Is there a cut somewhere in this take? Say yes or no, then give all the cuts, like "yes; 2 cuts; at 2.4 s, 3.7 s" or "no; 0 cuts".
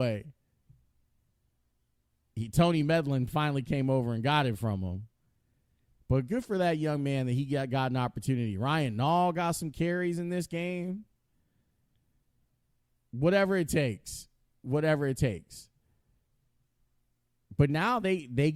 no; 0 cuts